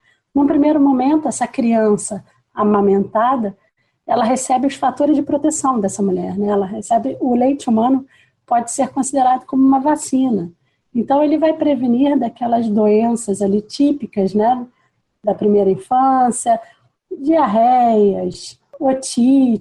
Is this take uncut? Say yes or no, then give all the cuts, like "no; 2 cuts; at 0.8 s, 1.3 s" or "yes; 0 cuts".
yes; 0 cuts